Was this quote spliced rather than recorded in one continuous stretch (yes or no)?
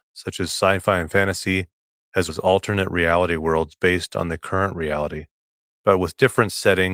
yes